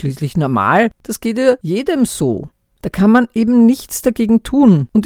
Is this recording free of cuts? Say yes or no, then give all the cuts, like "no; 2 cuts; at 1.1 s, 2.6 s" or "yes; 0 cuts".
yes; 0 cuts